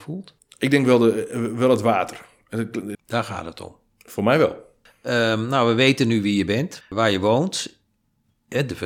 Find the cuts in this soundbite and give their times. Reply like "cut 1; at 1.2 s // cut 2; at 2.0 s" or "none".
cut 1; at 2.9 s // cut 2; at 6.8 s